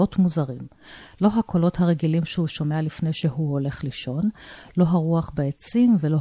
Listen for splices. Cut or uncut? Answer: uncut